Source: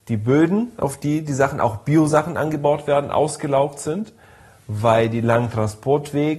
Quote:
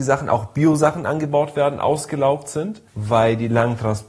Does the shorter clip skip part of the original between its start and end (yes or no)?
yes